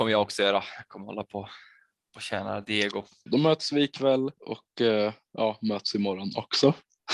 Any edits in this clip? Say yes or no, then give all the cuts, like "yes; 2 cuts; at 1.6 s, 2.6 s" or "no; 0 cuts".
yes; 2 cuts; at 3.3 s, 4.4 s